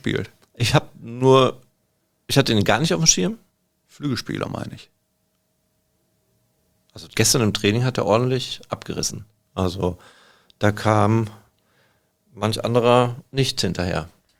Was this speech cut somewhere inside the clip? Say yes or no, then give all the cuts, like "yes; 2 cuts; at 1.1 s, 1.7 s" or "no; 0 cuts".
no; 0 cuts